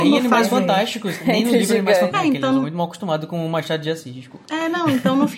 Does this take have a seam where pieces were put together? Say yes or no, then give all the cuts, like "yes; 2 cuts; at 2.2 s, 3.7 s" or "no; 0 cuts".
yes; 1 cut; at 2.1 s